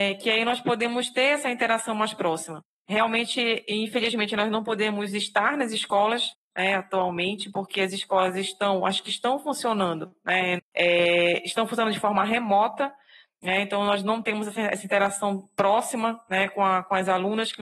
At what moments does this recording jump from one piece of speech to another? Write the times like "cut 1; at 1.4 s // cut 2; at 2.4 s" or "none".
cut 1; at 10.6 s